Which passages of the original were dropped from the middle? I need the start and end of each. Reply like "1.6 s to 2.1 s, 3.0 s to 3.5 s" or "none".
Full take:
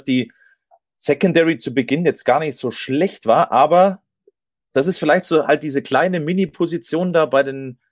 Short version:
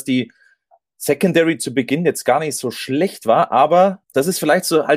4.0 s to 4.6 s